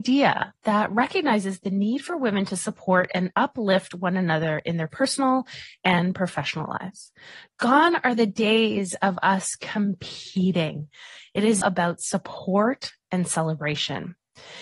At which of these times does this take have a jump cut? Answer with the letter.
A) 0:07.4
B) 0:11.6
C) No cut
B